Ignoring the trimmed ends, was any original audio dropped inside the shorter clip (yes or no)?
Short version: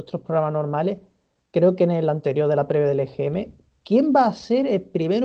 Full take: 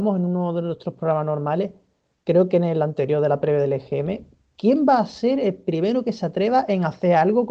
no